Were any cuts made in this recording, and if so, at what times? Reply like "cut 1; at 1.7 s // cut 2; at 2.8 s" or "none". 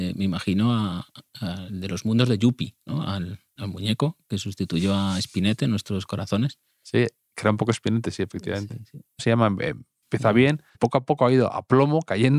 cut 1; at 3.6 s // cut 2; at 9.2 s // cut 3; at 10.7 s